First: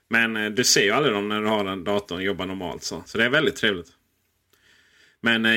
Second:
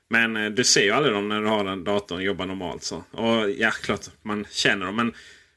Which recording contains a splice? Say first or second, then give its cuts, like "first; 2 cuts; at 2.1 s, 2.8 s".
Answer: first; 1 cut; at 3.1 s